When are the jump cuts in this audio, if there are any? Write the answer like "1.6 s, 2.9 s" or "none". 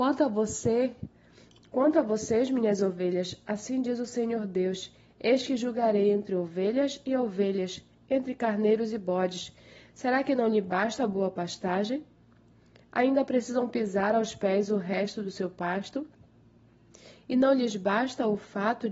none

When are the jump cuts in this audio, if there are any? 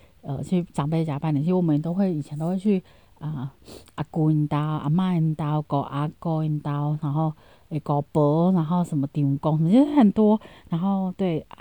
none

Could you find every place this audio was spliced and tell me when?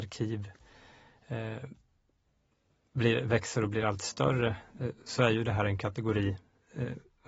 none

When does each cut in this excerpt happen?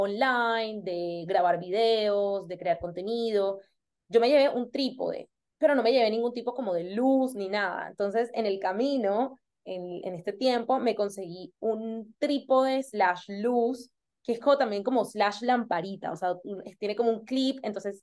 none

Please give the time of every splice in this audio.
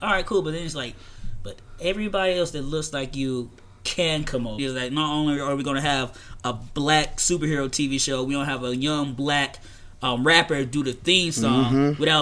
4.6 s

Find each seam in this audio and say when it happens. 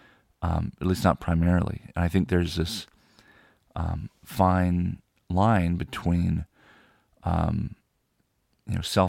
none

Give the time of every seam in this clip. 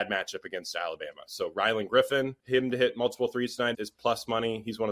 2.4 s, 3.7 s

